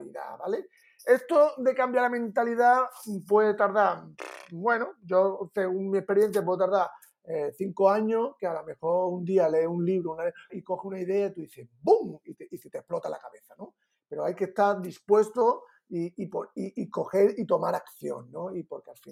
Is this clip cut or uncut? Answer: cut